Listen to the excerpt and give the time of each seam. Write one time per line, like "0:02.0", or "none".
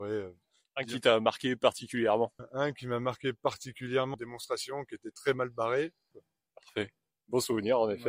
0:06.1